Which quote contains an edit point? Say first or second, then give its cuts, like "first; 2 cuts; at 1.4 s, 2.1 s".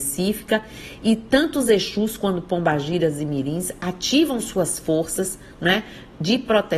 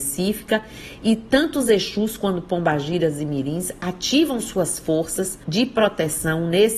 second; 1 cut; at 5.4 s